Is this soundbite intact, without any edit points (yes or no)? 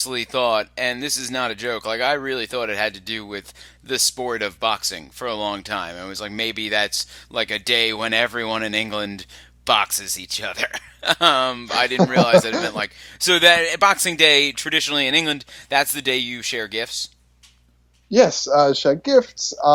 yes